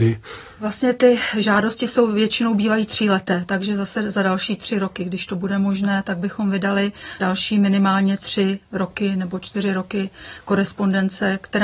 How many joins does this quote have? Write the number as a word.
zero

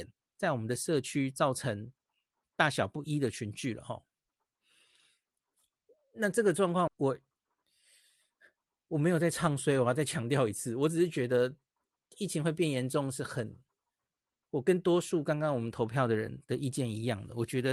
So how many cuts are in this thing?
one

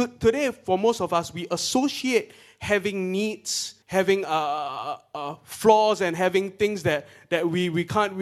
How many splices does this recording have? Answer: one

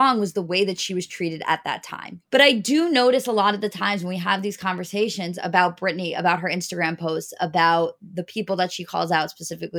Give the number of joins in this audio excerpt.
one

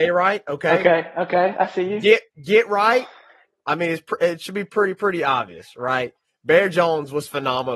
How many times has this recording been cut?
zero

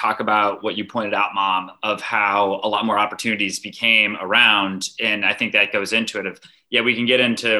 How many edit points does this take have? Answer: zero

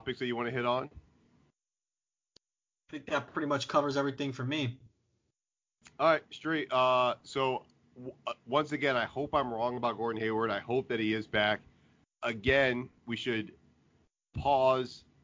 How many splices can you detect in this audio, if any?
one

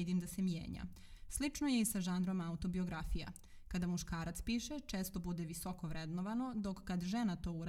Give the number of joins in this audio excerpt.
one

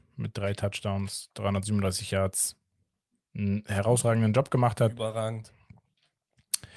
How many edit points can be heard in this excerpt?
zero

